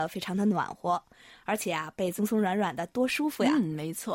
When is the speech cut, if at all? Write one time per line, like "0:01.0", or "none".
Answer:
0:02.2